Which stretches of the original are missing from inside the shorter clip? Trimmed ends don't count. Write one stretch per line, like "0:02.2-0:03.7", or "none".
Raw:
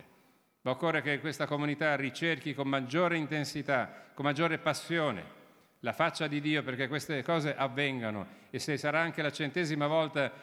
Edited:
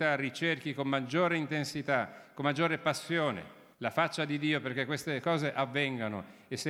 0:05.5-0:05.7